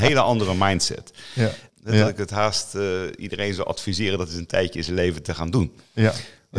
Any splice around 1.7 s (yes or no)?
yes